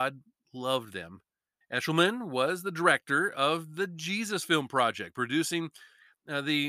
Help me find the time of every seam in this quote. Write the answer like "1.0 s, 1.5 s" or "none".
1.6 s